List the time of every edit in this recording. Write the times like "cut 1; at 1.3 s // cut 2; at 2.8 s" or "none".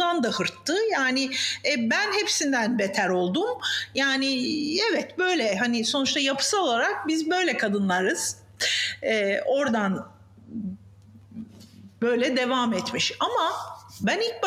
none